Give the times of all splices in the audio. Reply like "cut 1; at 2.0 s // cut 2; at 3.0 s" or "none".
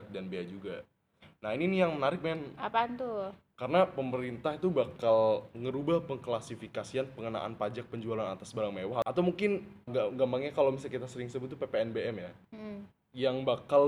cut 1; at 9.9 s